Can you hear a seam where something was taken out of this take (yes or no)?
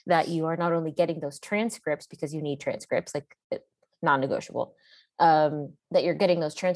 yes